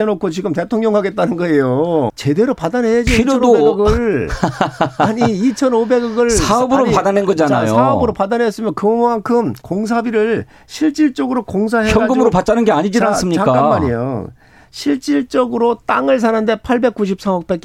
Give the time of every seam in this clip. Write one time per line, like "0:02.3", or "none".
0:02.1
0:09.6